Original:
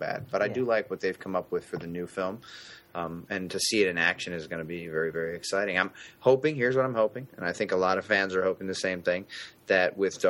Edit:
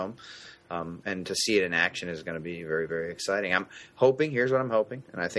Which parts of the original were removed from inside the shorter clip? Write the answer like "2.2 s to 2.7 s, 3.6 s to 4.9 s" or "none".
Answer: none